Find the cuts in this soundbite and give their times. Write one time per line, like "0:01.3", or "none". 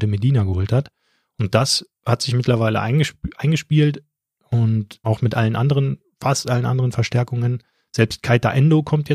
0:05.0